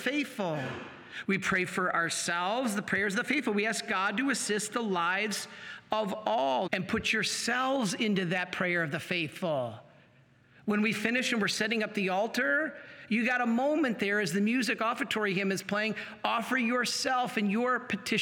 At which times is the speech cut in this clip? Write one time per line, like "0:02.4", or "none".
0:01.2
0:06.7